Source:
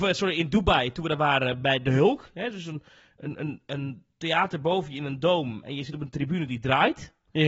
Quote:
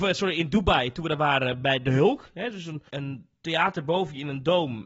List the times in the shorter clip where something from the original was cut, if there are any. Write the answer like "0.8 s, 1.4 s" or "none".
2.9 s